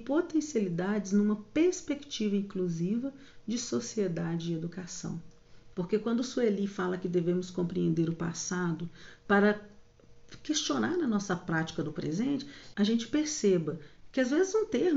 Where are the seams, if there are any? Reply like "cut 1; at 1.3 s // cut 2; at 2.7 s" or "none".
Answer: cut 1; at 5.7 s // cut 2; at 12.7 s